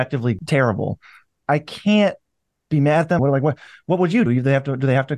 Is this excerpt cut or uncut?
cut